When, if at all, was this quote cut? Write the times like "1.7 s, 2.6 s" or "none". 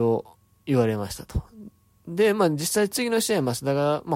none